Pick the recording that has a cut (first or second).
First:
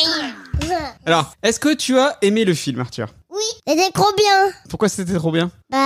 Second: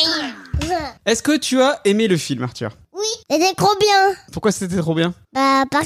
second